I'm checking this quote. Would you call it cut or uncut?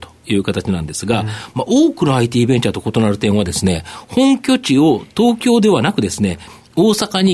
uncut